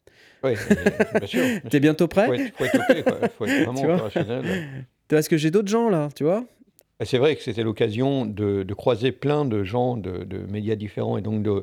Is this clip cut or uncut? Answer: cut